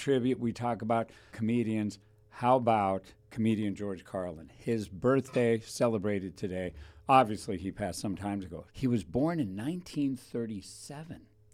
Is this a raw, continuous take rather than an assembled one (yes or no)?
no